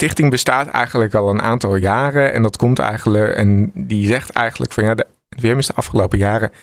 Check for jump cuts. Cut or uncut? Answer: cut